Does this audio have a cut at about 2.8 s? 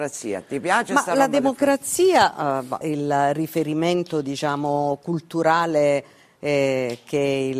yes; 1 cut; at 2.8 s

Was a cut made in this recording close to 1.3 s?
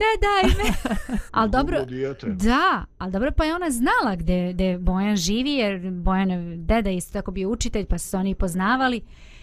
yes; 1 cut; at 1.3 s

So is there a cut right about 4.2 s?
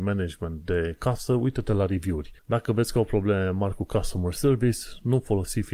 no; 1 cut; at 2.4 s

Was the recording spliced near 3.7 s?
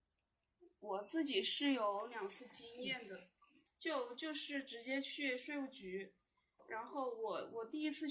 yes; 1 cut; at 3.7 s

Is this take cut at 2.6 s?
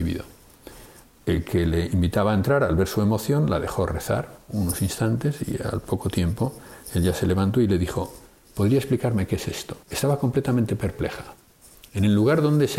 no; 2 cuts; at 1.0 s, 9.8 s

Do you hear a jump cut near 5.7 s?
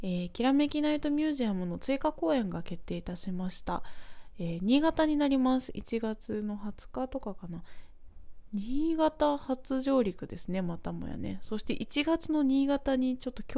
no; 0 cuts

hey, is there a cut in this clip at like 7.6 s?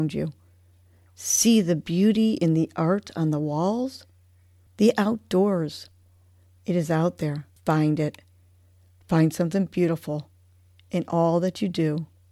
yes; 3 cuts; at 4.7 s, 6.5 s, 7.6 s

